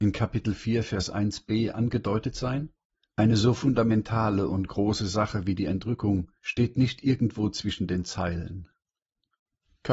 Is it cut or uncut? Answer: cut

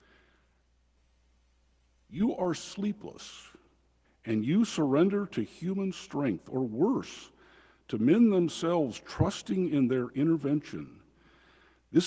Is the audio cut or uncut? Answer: cut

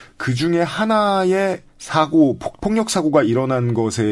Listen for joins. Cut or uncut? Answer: cut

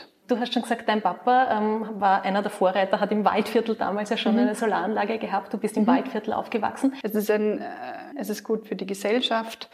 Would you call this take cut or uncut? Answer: cut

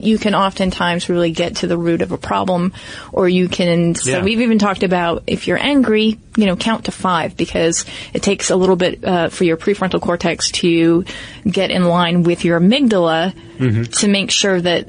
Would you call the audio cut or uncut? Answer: cut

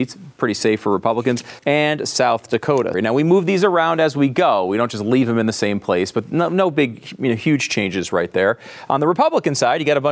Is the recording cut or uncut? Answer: cut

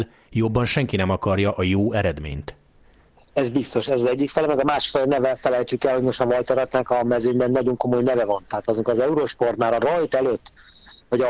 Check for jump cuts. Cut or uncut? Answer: uncut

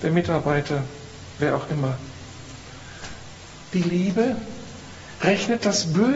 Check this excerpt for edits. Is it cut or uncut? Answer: uncut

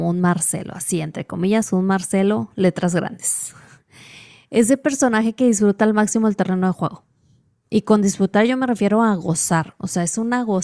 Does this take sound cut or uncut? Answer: uncut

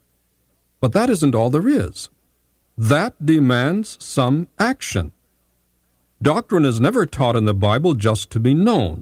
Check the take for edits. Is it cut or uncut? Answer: uncut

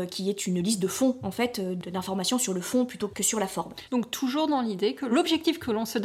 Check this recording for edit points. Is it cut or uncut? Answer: cut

